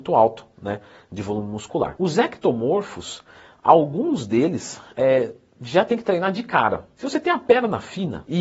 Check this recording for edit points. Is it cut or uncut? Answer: cut